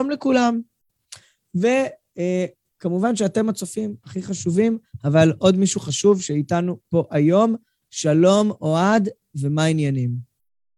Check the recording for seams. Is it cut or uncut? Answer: uncut